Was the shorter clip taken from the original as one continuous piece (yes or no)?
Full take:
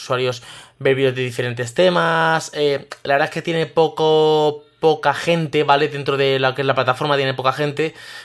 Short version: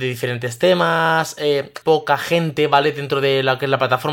no